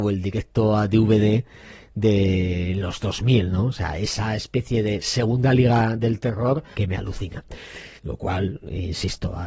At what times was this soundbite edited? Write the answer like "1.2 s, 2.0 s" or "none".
6.7 s, 8.0 s